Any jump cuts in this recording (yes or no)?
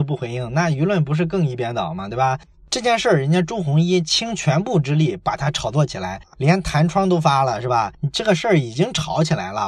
no